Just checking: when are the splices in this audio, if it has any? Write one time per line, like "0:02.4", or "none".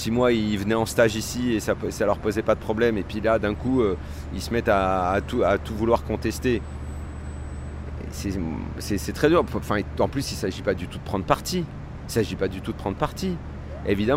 none